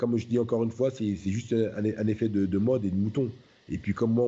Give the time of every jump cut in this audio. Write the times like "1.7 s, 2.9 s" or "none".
none